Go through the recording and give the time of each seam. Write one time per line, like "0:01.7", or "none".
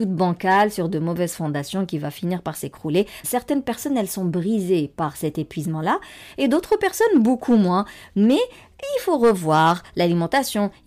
0:03.2